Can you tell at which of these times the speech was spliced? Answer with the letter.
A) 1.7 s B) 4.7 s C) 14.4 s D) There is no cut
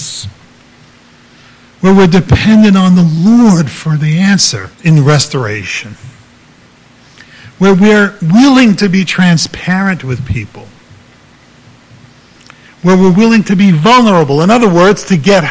B